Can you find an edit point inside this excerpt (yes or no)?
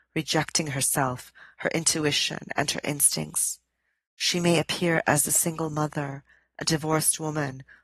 no